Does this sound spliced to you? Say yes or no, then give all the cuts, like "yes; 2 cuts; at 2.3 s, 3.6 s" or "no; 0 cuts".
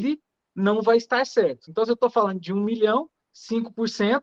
no; 0 cuts